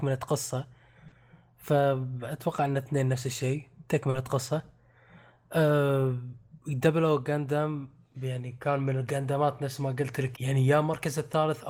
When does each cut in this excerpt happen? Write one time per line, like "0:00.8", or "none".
0:10.3